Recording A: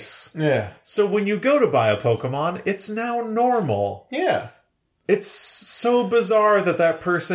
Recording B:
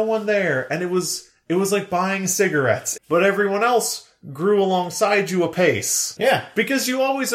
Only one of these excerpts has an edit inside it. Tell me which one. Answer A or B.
B